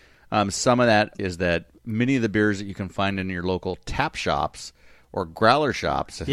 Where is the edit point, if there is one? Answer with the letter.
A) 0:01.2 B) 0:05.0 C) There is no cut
A